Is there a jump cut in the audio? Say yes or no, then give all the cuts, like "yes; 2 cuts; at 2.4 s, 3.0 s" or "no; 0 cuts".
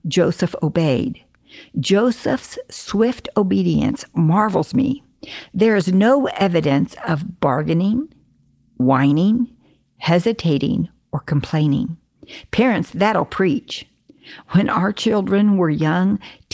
no; 0 cuts